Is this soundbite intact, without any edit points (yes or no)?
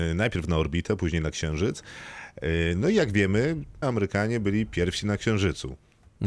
no